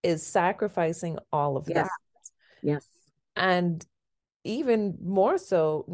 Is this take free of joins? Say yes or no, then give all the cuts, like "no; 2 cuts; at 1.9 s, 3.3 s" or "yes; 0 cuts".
yes; 0 cuts